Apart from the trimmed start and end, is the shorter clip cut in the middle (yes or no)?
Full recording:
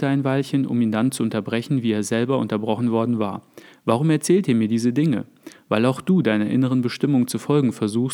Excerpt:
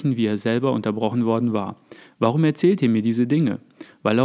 no